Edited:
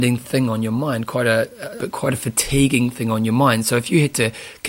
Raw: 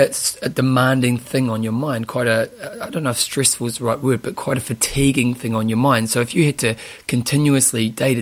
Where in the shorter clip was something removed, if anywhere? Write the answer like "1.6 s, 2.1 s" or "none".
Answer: 1.8 s